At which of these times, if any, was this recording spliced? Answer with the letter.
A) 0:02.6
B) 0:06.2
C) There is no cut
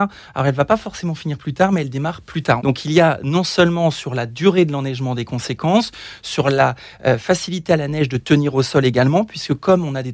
A